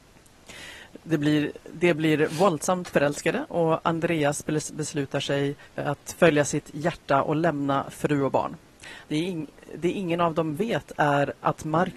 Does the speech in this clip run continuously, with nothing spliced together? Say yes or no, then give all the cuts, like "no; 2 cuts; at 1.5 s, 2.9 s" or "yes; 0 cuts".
no; 2 cuts; at 5.6 s, 9.0 s